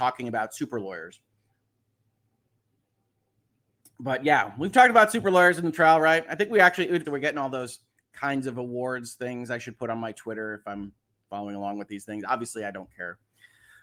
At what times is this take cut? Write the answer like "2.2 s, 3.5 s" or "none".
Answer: 7.0 s